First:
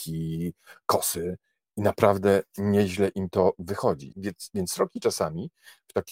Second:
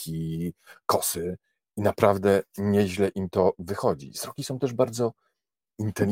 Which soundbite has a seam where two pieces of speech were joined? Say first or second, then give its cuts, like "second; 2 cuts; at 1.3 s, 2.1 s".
first; 1 cut; at 4.1 s